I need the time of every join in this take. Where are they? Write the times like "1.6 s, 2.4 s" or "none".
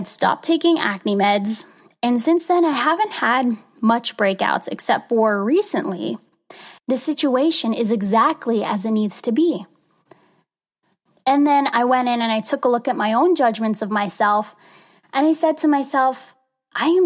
6.8 s